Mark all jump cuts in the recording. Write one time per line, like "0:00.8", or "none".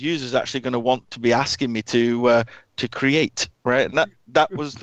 none